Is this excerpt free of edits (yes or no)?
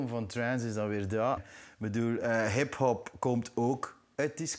no